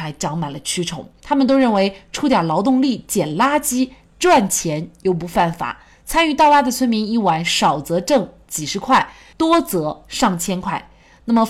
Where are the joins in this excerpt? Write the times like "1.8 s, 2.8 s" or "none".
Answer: 1.2 s